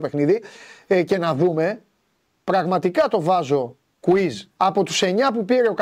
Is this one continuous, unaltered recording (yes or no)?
no